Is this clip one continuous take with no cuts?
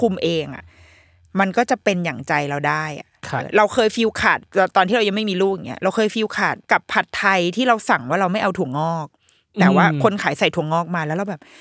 no; 2 cuts; at 3.4 s, 6.6 s

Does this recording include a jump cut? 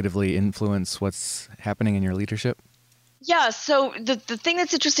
no; 0 cuts

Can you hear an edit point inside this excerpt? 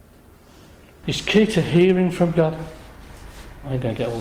yes; 1 cut; at 1.0 s

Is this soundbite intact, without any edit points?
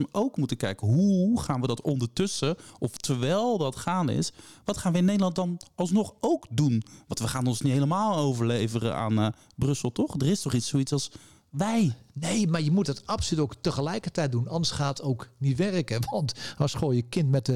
yes; 0 cuts

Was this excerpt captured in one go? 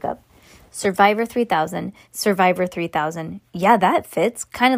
no; 1 cut; at 2.0 s

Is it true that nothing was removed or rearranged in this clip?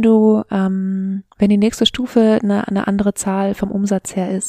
no; 1 cut; at 1.3 s

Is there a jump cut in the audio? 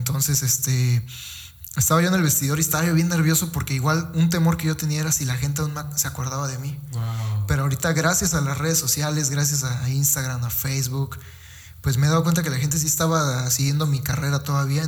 no; 0 cuts

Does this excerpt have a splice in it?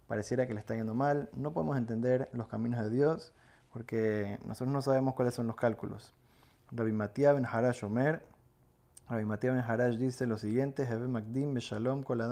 no; 0 cuts

